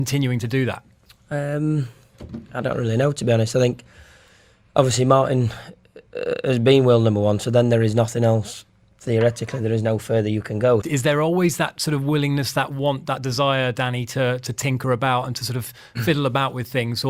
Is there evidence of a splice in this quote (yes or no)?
yes